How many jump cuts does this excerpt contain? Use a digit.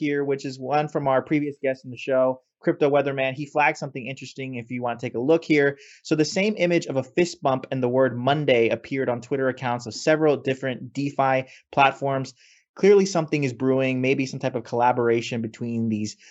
0